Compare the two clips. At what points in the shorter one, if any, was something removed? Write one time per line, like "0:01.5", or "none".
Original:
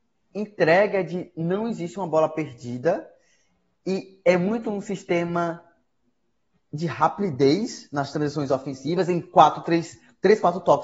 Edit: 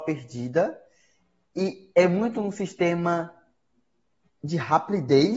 none